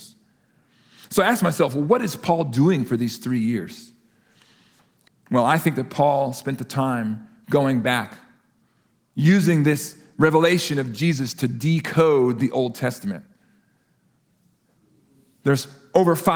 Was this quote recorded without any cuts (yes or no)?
no